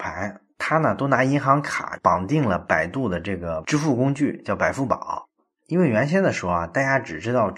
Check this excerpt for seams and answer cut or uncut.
uncut